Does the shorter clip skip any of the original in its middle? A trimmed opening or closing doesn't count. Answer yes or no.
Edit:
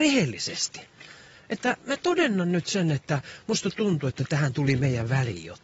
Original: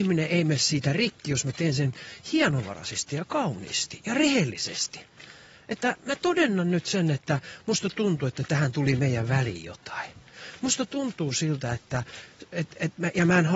no